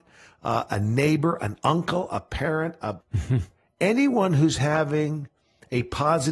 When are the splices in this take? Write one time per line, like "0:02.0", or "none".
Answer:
0:03.0